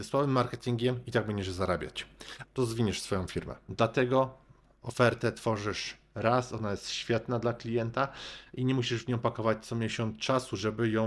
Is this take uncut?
no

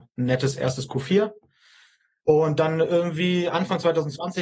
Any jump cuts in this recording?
no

